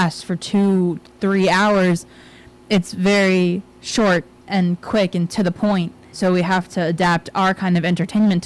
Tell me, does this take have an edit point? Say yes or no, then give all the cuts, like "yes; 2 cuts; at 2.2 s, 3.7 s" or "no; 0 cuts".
yes; 1 cut; at 6.1 s